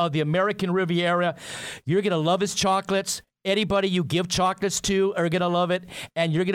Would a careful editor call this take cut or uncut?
uncut